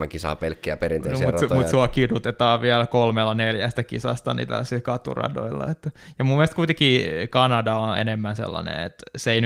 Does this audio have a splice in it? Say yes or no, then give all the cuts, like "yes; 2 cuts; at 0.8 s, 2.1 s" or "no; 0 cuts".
no; 0 cuts